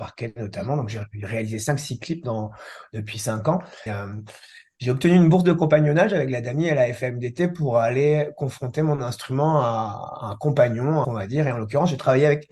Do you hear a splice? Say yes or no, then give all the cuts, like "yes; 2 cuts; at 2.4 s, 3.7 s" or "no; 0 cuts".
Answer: yes; 2 cuts; at 3.9 s, 11.0 s